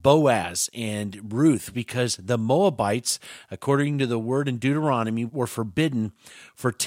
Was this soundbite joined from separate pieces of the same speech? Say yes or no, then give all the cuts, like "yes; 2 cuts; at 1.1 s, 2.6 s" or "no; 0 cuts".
yes; 2 cuts; at 1.7 s, 5.3 s